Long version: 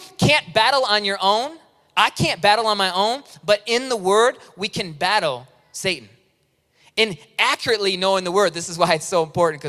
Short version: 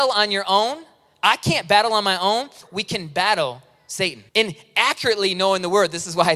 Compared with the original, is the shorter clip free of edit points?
no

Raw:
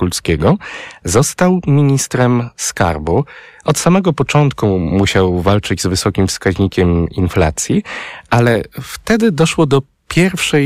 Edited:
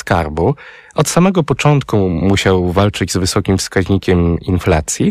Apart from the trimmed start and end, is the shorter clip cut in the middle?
no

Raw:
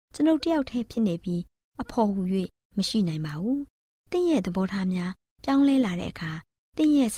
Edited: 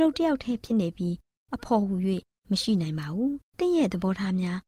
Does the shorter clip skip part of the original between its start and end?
yes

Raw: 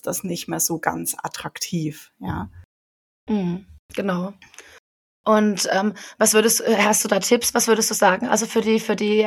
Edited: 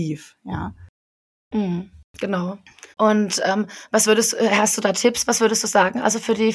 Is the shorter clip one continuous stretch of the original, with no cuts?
no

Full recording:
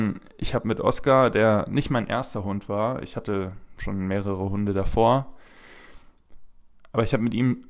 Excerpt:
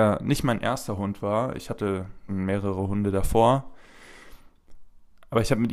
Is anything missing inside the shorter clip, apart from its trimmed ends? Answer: yes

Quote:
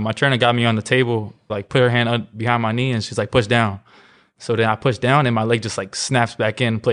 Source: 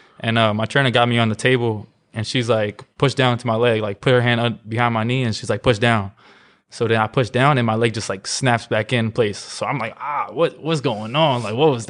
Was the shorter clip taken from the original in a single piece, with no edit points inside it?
no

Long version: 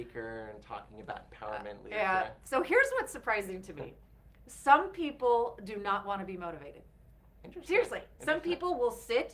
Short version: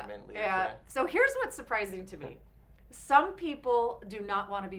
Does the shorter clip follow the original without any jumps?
yes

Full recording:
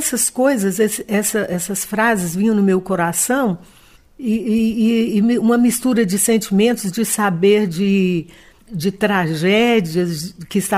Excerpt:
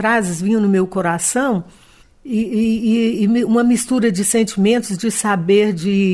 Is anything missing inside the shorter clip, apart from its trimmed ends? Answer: no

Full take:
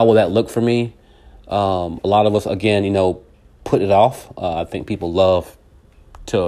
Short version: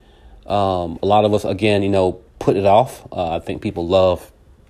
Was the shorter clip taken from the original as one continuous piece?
no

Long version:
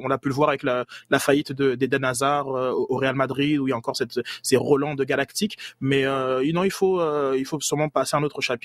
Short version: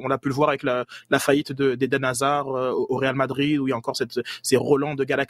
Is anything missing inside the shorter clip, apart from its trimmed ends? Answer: no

